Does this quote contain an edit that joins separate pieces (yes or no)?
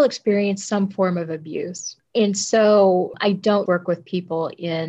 yes